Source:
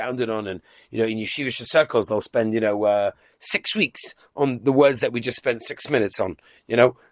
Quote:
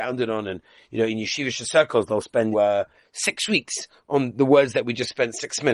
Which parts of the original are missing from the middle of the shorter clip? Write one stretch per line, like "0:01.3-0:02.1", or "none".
0:02.5-0:02.8